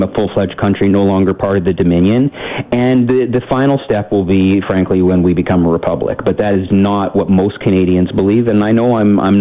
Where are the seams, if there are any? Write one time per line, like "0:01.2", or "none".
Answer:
0:06.7